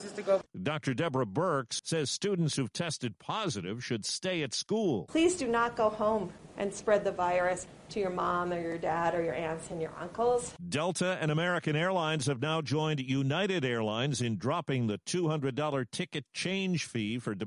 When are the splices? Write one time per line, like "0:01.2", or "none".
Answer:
0:01.8